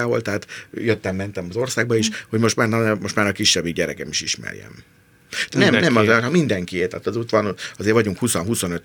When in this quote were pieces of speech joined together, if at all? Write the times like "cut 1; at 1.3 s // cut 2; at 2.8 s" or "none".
cut 1; at 5.5 s